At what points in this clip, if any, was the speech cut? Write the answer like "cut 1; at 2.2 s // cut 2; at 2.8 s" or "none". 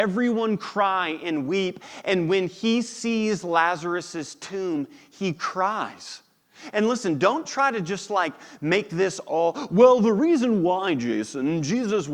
none